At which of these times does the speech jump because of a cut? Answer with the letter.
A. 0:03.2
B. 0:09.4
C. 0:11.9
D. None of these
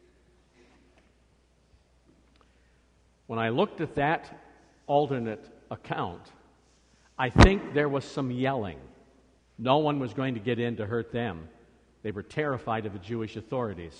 B